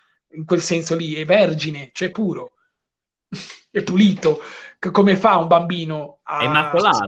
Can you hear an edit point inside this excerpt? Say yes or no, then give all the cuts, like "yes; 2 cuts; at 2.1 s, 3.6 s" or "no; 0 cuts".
yes; 1 cut; at 2.1 s